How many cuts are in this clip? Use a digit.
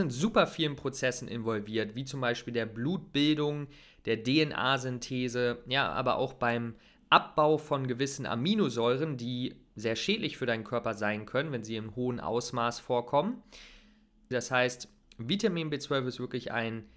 1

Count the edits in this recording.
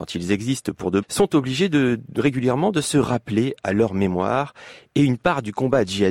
1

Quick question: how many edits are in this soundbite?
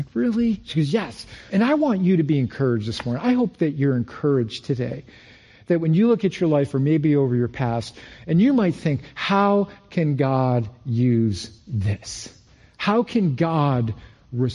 1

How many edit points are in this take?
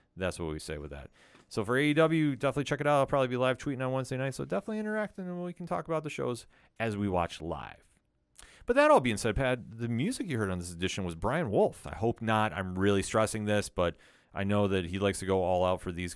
1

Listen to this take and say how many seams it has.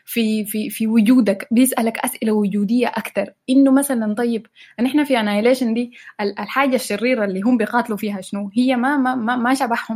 0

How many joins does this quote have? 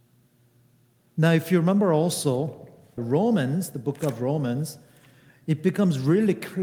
1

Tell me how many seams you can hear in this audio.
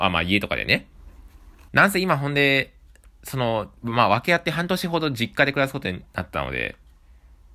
1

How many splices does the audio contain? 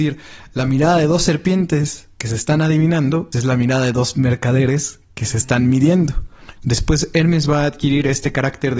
2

